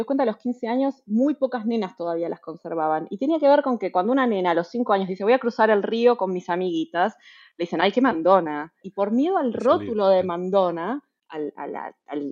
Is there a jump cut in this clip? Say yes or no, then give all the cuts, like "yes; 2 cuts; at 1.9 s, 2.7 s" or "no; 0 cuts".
yes; 1 cut; at 8.8 s